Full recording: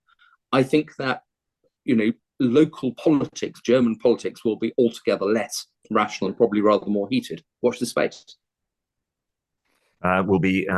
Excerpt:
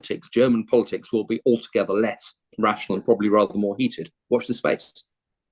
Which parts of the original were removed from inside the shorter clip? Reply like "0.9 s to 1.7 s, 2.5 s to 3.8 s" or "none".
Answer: none